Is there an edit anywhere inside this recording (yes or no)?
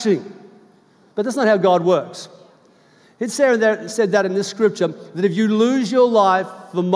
yes